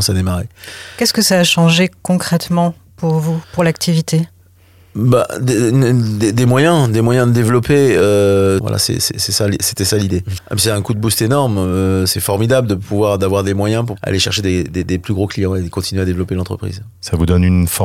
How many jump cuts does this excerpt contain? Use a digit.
2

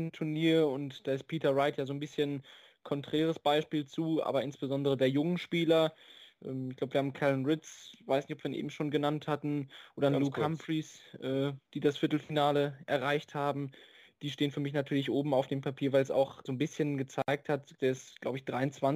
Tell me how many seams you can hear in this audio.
2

